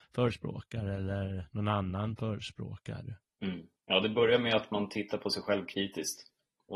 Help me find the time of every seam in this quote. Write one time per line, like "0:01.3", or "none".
0:03.8